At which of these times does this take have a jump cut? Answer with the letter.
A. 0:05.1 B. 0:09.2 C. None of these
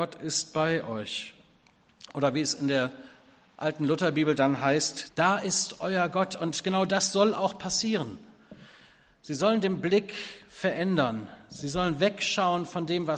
A